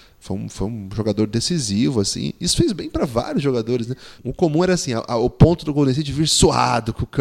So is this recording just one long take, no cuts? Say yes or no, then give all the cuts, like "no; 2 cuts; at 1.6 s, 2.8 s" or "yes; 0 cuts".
no; 1 cut; at 4.2 s